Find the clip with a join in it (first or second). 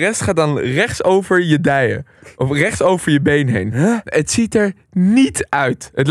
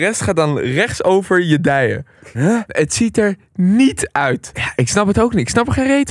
second